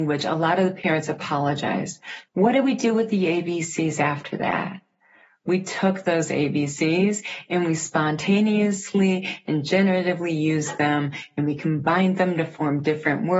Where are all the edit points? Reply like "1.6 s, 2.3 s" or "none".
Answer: 2.3 s